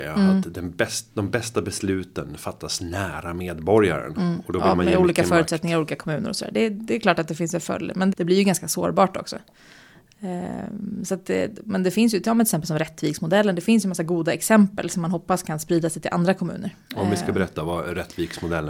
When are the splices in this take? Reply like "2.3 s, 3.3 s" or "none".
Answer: 8.1 s